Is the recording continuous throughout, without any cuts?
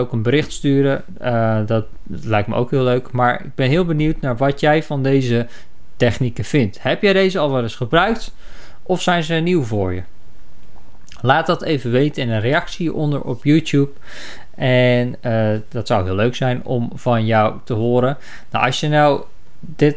yes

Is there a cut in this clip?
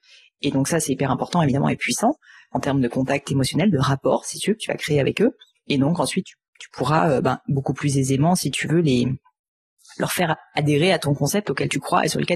no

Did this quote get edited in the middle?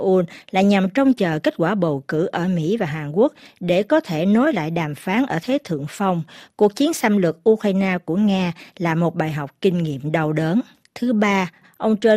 yes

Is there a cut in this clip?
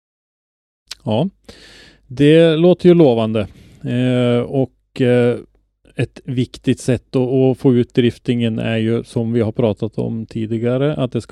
no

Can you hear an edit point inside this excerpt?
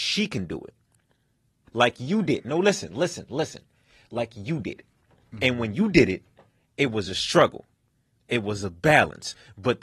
yes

